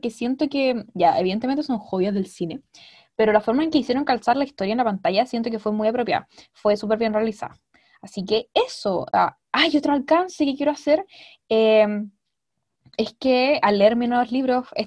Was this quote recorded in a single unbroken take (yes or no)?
yes